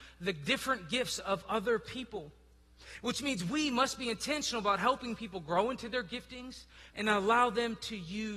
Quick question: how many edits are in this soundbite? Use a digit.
1